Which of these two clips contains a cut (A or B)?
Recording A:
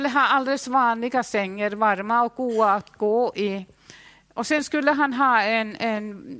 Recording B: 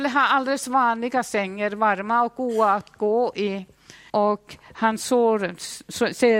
B